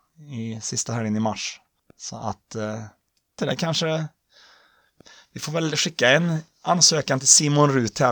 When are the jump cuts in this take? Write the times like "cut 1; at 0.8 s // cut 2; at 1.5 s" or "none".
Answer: cut 1; at 3.4 s